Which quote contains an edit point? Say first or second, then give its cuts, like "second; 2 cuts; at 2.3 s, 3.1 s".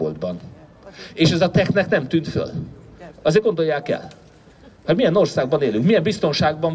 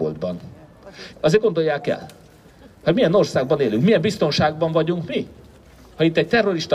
second; 1 cut; at 1.1 s